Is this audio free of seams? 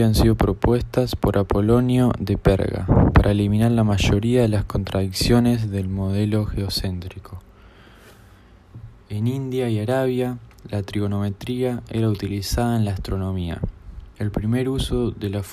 no; 1 cut; at 14.1 s

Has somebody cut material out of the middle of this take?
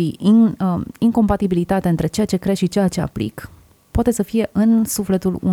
no; 0 cuts

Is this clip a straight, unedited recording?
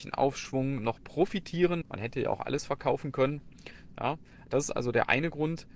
no; 1 cut; at 1.8 s

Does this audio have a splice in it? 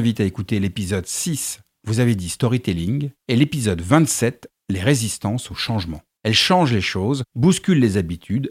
yes; 1 cut; at 6.2 s

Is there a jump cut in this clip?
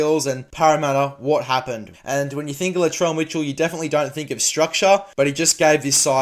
yes; 1 cut; at 1.9 s

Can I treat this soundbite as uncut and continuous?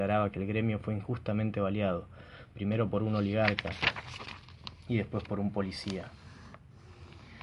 yes; 0 cuts

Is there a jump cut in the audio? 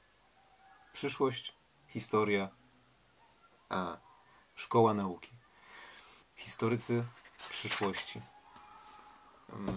yes; 1 cut; at 6.2 s

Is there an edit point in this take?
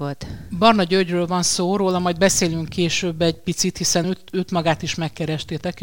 no; 0 cuts

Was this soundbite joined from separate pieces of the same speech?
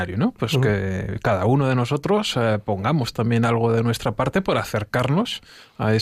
no; 0 cuts

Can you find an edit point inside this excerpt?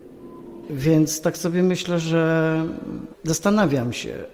yes; 1 cut; at 3.1 s

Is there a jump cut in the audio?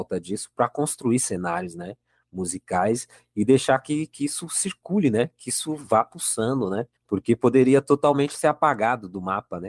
yes; 1 cut; at 7.0 s

